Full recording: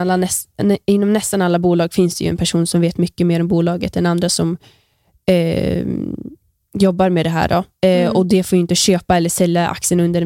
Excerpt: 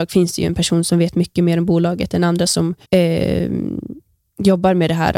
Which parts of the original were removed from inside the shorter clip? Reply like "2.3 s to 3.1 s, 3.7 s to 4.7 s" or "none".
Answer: 4.7 s to 5.2 s